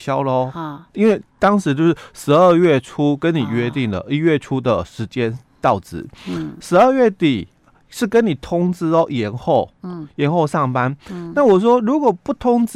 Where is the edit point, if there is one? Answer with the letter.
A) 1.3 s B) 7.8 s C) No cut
A